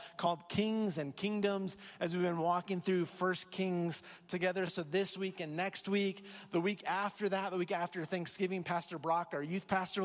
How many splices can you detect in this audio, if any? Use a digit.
0